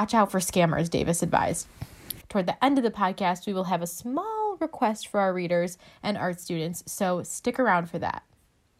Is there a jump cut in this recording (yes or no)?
yes